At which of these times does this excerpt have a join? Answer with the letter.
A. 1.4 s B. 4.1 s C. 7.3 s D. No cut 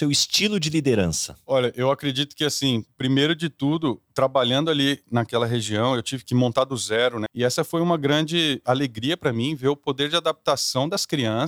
C